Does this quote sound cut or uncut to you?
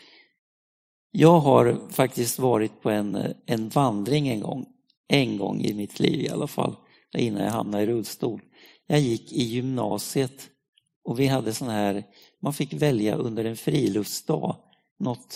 uncut